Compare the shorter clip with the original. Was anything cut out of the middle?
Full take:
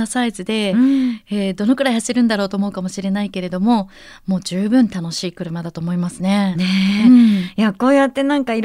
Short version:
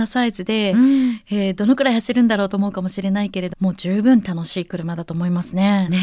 yes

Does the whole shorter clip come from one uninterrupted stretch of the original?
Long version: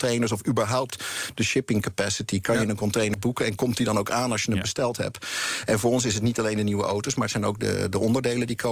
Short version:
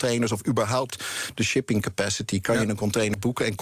yes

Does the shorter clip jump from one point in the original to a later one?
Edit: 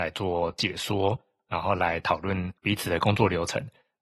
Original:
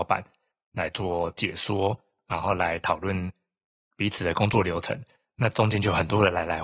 yes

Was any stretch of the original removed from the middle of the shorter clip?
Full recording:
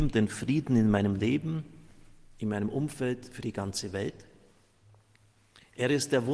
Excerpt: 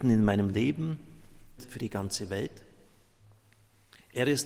yes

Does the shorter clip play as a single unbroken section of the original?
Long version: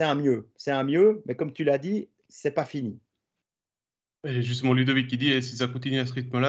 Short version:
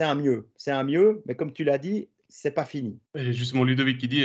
no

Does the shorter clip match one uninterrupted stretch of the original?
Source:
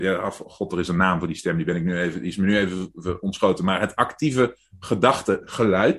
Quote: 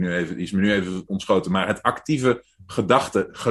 no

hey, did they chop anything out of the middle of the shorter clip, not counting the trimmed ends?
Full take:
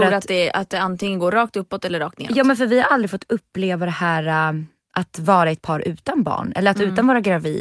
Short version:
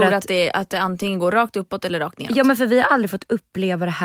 no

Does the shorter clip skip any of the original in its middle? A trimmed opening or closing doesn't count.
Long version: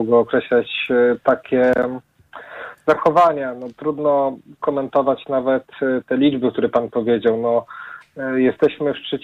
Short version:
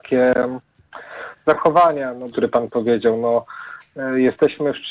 yes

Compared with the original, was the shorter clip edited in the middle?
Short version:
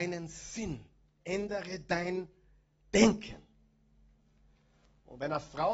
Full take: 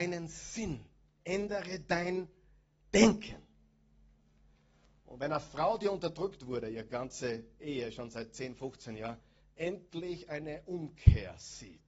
no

